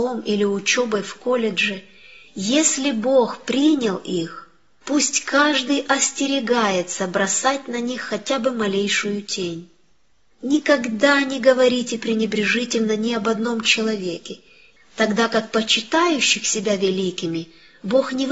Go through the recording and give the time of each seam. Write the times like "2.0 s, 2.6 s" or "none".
14.8 s